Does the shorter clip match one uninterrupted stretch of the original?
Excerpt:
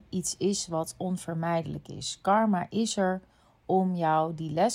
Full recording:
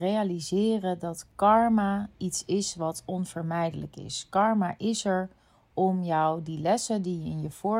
yes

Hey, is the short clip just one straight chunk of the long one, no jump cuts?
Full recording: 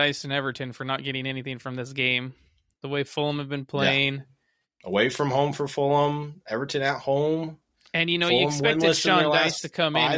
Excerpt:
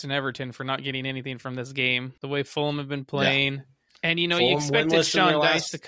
no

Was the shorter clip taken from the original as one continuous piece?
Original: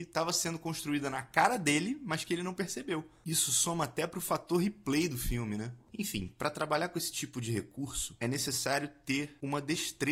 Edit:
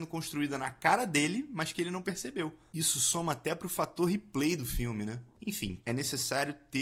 no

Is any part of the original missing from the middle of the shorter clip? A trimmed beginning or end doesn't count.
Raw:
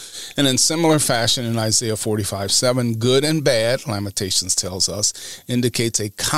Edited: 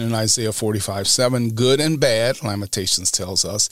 no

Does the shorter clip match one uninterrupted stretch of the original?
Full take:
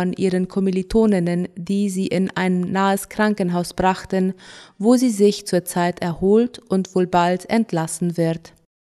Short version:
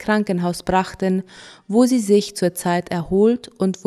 yes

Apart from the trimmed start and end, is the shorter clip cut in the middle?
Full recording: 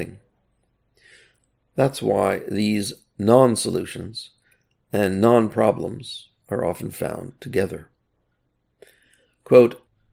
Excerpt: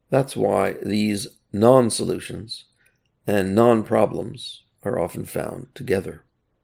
no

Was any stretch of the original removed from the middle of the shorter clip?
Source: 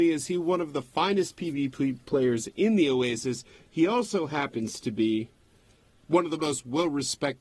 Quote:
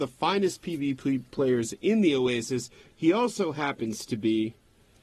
no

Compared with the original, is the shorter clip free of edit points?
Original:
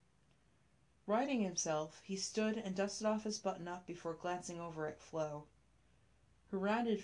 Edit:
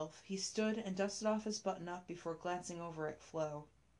yes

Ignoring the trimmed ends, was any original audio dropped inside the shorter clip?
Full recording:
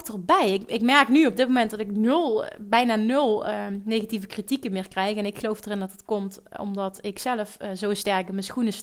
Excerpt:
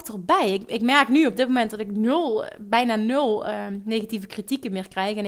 no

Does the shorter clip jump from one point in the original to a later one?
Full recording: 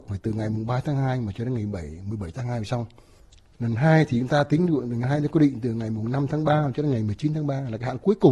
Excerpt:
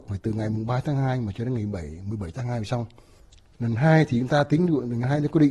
no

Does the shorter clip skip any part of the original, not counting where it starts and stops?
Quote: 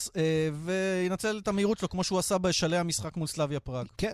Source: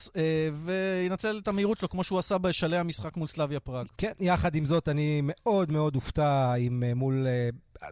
no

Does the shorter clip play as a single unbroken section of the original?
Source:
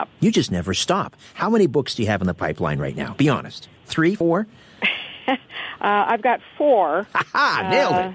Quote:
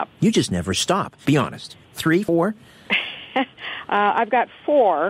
no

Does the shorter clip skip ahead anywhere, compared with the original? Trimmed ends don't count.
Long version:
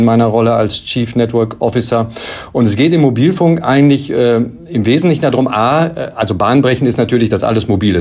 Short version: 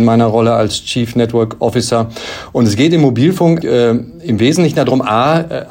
yes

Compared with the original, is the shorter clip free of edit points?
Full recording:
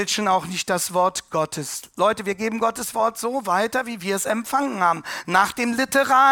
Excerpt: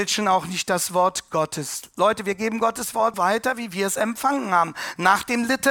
no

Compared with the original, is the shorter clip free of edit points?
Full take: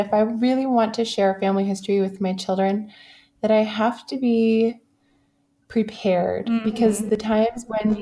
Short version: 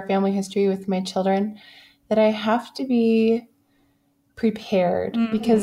yes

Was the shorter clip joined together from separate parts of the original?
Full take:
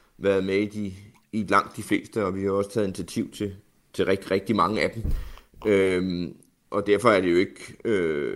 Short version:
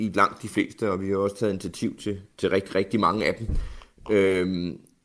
yes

